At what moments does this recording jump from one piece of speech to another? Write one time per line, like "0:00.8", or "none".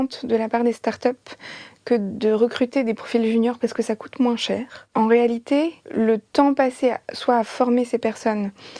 0:05.8

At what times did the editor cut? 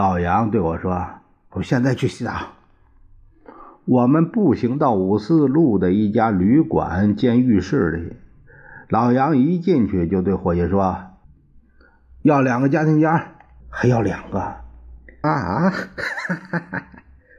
0:11.2
0:13.6
0:15.2

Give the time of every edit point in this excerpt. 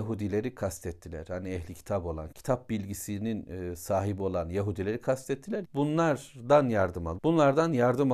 0:02.3
0:05.6
0:07.2

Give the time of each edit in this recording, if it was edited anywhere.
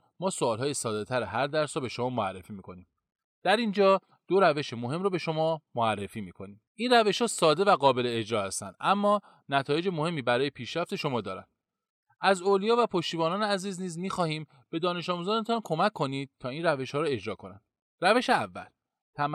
0:03.2
0:06.7

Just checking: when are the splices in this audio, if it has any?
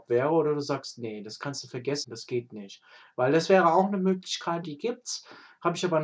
0:02.0
0:04.6

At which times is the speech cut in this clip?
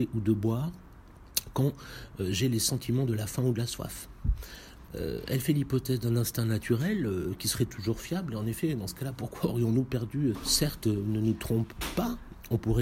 0:04.9
0:10.3

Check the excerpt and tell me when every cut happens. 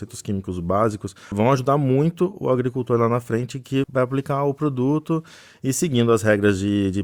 0:01.3
0:03.8

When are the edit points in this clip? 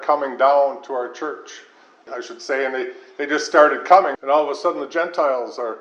0:02.1
0:04.1

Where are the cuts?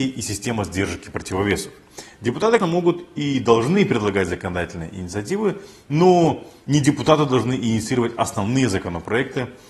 0:02.6

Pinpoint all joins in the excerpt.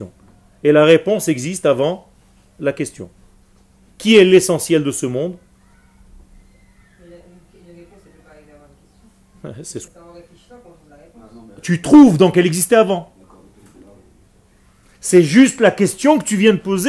0:09.9

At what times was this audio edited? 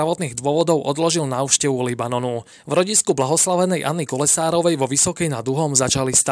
0:02.5

